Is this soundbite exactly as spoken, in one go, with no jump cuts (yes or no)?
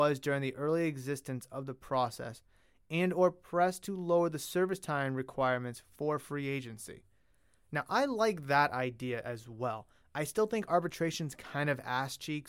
yes